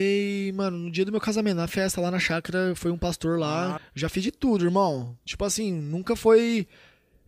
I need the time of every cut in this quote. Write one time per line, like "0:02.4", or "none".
0:03.8